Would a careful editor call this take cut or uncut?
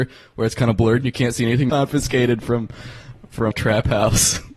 cut